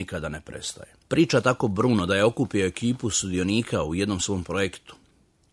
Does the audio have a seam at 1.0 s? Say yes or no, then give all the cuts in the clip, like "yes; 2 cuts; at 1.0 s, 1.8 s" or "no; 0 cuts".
yes; 1 cut; at 1.0 s